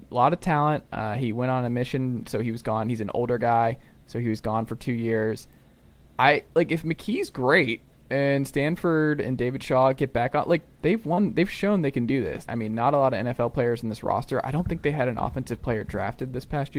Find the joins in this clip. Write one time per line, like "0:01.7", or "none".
0:12.5